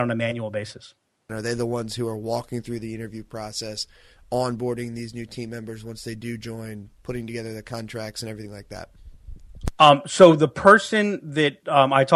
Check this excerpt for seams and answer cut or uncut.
cut